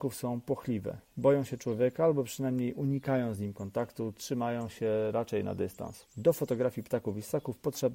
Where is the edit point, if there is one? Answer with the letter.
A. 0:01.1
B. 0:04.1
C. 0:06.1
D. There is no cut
C